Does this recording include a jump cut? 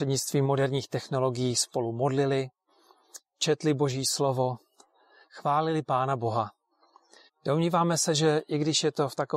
yes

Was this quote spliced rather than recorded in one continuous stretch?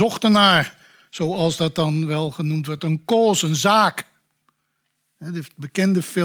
no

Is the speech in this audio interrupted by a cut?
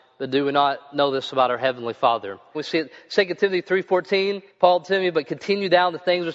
yes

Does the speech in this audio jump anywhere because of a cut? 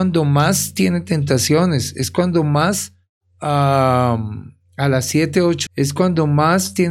yes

